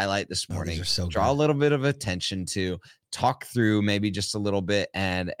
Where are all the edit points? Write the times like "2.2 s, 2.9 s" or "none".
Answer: none